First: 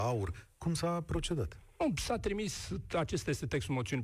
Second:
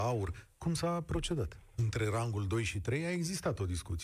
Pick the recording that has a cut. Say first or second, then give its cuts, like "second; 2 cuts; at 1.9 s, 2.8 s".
second; 1 cut; at 1.7 s